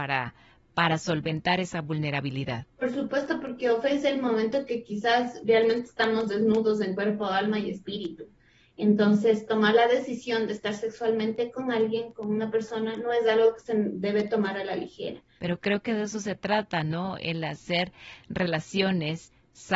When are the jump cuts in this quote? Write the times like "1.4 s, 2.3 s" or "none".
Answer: 15.4 s